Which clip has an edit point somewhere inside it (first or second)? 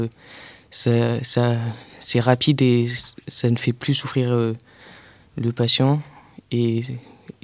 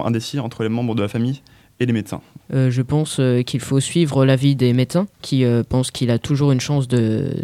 second